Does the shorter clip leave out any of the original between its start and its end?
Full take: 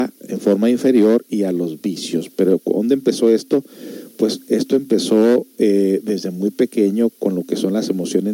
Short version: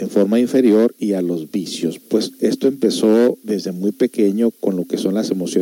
yes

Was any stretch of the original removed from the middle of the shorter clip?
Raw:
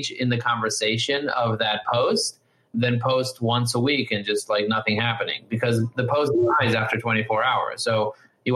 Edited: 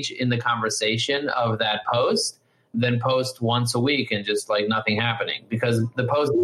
no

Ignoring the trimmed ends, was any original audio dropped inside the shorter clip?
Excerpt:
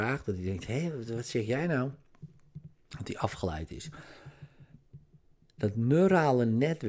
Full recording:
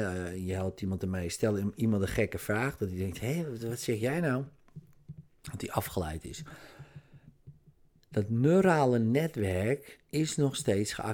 no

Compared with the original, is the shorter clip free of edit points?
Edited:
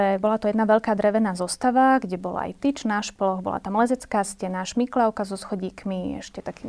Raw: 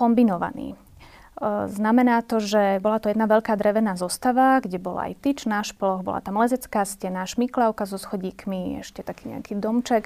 yes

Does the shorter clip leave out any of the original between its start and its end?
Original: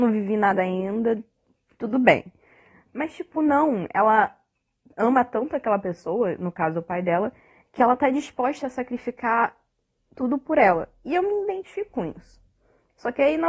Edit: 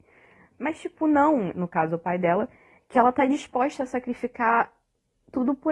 yes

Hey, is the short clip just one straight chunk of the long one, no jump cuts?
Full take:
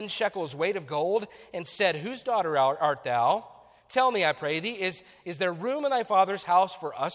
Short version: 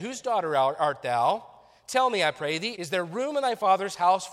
no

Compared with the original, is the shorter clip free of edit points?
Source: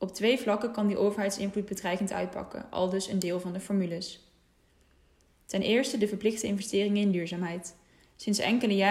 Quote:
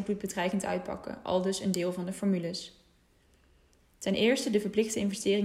yes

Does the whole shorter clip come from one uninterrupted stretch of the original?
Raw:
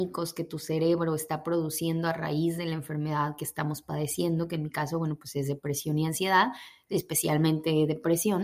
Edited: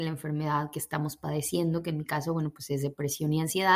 yes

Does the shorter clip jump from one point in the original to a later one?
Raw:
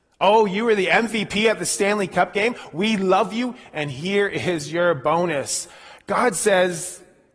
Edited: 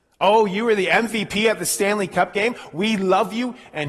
no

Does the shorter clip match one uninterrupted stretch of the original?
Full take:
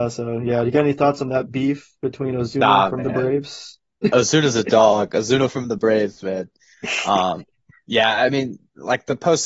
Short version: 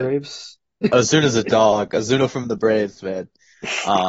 yes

